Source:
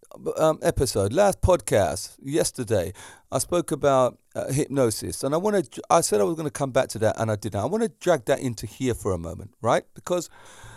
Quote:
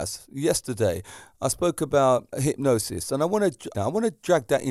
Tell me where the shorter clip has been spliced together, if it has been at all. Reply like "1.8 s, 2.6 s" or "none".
2.3 s, 3.7 s